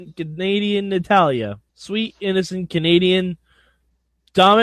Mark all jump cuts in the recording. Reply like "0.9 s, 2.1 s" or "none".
1.7 s